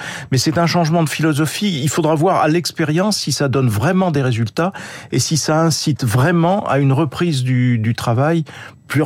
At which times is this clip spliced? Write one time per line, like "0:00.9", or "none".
none